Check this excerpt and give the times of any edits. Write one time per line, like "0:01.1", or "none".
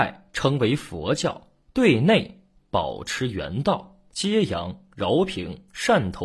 0:04.1